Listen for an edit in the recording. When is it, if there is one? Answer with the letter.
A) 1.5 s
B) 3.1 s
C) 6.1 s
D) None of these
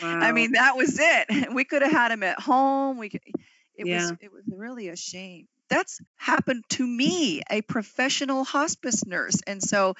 C